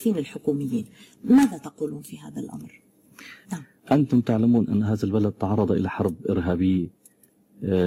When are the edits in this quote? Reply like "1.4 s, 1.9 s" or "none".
3.4 s